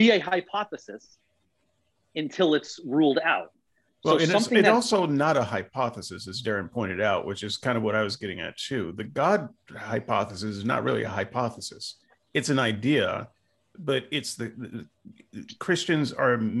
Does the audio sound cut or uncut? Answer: uncut